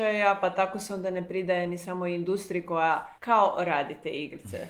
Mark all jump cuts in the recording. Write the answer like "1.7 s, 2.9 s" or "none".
3.2 s